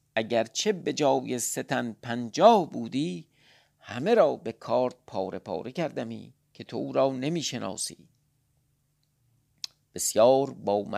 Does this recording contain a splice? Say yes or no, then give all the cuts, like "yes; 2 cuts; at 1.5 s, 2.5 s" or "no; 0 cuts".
yes; 1 cut; at 6.4 s